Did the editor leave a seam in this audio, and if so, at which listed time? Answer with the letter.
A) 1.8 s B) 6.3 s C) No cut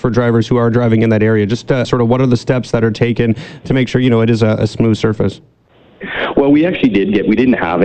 A